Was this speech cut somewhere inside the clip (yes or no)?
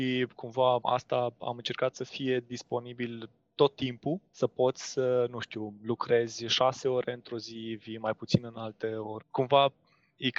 yes